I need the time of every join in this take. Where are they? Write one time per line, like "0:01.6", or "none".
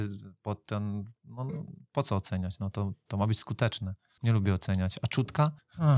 none